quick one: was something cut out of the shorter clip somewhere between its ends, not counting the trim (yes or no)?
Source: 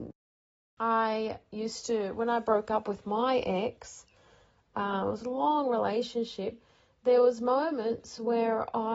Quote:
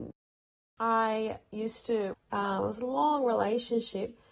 yes